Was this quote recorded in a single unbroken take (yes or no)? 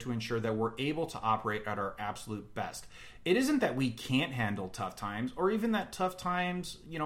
yes